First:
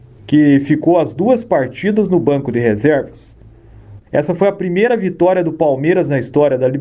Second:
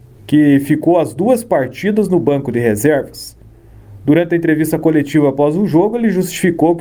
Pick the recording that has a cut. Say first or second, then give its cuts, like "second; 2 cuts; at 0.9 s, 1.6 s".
first; 1 cut; at 4.0 s